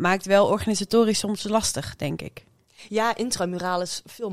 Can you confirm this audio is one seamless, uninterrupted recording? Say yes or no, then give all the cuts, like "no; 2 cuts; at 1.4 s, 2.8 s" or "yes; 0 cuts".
yes; 0 cuts